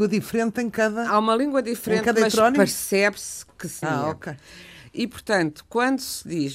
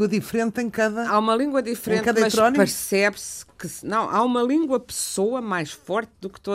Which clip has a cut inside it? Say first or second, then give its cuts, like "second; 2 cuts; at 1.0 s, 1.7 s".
first; 1 cut; at 3.8 s